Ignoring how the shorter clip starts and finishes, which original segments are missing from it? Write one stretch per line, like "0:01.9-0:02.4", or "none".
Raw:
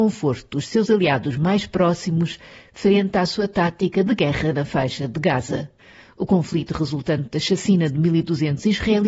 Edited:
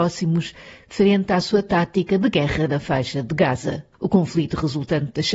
0:05.8-0:06.1